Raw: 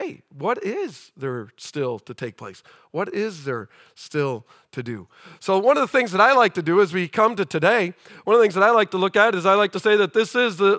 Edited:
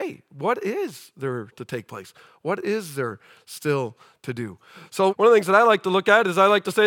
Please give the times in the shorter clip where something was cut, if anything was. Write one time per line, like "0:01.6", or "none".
0:01.5
0:05.1